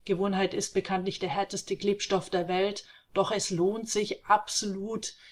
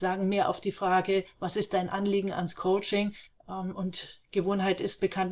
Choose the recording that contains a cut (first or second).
second